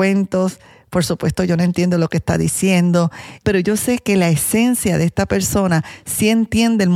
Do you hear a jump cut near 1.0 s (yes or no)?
no